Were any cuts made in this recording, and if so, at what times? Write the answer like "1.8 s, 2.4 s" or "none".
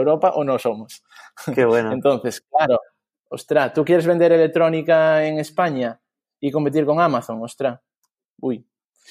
none